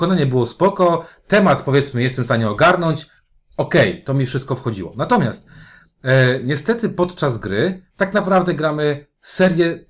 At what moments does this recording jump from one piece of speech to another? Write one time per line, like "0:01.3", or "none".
0:07.9